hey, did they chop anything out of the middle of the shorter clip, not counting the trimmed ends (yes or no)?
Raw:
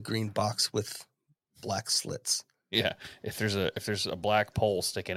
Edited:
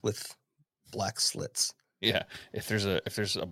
no